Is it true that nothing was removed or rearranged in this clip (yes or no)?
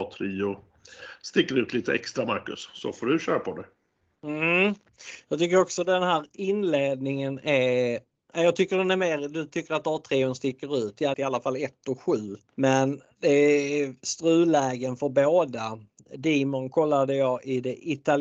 no